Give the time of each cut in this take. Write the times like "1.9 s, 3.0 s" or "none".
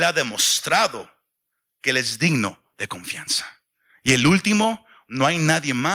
none